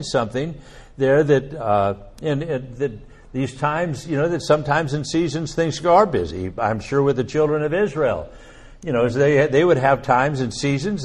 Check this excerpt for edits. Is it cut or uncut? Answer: uncut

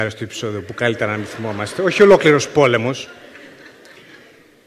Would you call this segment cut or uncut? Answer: uncut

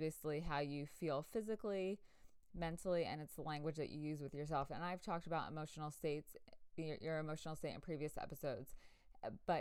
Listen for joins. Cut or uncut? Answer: uncut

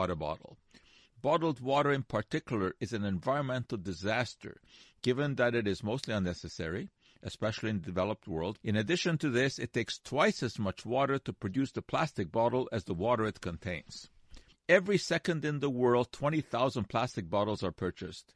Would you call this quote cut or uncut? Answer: cut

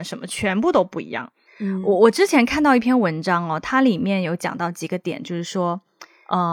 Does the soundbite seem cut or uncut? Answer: cut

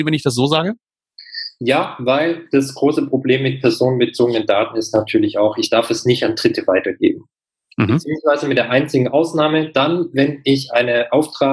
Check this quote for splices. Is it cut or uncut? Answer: uncut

